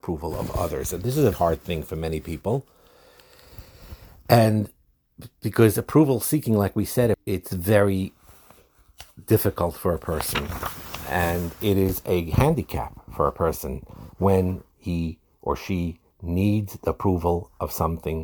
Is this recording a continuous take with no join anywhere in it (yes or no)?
no